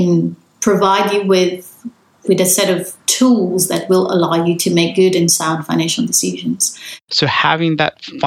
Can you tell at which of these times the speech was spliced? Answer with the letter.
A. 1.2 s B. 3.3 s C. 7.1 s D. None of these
C